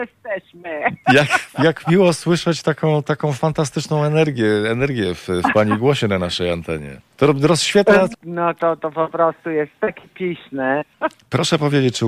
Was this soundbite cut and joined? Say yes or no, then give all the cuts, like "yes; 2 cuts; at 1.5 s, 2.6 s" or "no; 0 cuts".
yes; 2 cuts; at 8.1 s, 10.9 s